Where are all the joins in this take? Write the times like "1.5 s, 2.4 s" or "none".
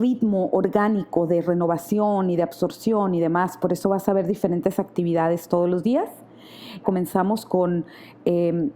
6.8 s